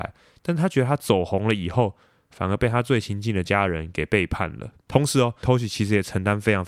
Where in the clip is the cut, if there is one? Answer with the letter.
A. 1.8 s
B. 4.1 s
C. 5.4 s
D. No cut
C